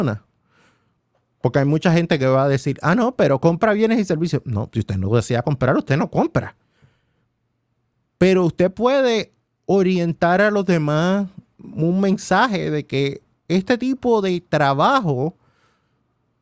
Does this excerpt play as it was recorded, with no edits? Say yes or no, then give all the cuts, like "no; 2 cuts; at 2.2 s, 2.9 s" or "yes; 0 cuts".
no; 1 cut; at 11.6 s